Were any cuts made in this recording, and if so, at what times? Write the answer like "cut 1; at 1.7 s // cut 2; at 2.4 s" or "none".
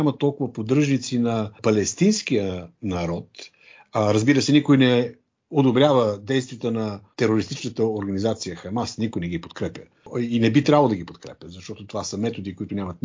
none